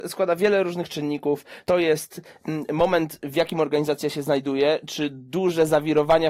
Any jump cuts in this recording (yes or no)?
no